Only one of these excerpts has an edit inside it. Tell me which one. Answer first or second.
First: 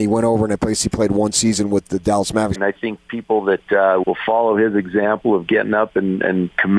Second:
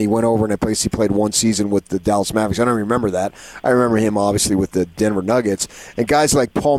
first